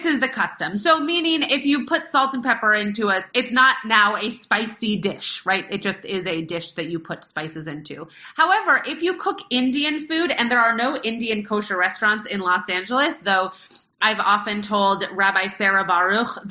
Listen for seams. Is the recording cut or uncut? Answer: cut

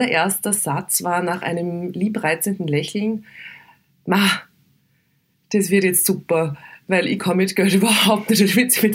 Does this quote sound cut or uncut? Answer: uncut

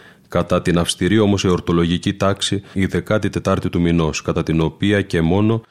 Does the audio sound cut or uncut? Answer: cut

